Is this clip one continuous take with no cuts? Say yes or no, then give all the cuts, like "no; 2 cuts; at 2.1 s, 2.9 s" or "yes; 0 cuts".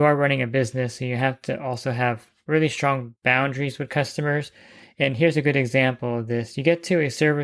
yes; 0 cuts